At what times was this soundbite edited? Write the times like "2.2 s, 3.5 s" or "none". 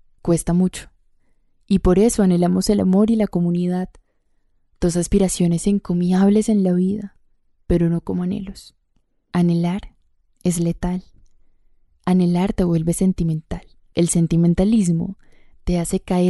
none